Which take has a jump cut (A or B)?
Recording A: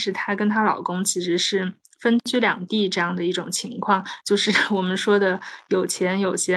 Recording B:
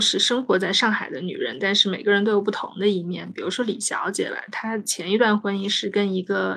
A